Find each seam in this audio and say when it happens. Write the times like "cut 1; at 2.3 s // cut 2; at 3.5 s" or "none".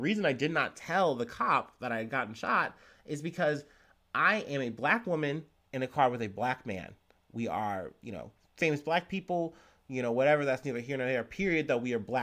none